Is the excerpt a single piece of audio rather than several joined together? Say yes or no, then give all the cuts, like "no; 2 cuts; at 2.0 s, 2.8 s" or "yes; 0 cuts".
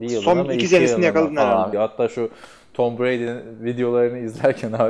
no; 1 cut; at 1.7 s